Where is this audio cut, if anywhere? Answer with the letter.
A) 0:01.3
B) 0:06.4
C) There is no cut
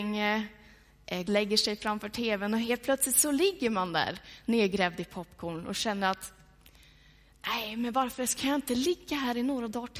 A